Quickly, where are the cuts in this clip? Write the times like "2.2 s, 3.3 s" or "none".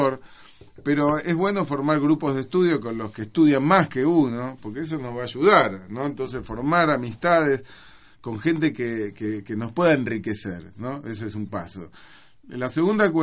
none